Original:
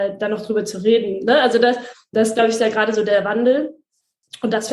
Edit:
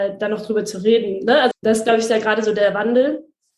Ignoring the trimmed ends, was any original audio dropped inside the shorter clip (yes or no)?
yes